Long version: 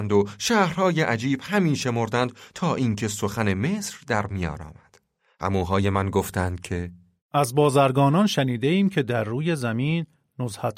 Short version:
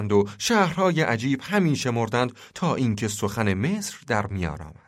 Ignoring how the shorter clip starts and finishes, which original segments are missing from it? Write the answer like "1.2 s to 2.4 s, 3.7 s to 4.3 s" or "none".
none